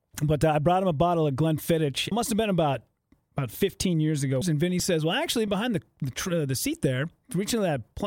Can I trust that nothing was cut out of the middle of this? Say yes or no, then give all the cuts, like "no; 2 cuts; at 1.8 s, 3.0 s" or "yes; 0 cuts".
no; 3 cuts; at 2.1 s, 4.4 s, 5.5 s